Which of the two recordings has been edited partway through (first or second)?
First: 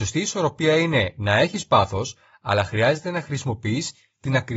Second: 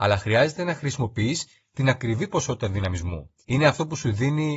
second